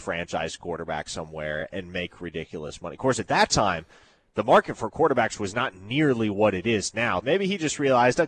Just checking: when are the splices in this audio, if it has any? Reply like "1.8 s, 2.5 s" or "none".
7.2 s